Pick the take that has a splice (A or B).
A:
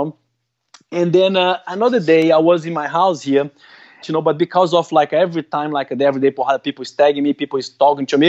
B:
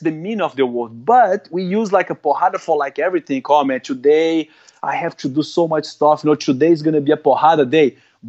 A